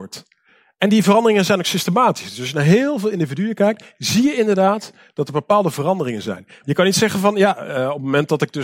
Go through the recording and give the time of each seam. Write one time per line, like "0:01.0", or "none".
0:06.6